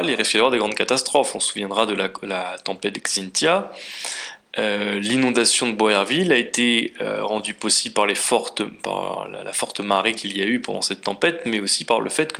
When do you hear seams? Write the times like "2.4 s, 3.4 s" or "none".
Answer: none